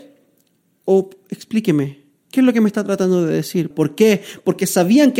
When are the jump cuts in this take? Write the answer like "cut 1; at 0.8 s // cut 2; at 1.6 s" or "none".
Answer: cut 1; at 3.7 s